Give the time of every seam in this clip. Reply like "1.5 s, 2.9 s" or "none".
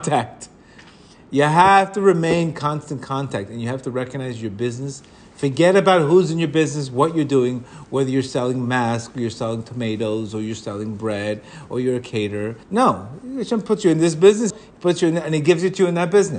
12.6 s, 14.5 s